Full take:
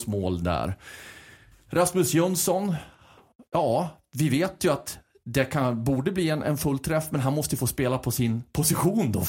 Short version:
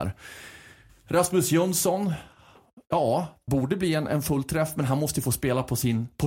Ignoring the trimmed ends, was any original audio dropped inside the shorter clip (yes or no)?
yes